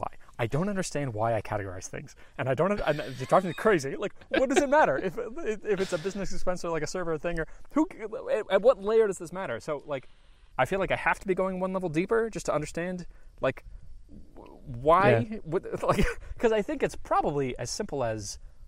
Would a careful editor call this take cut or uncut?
cut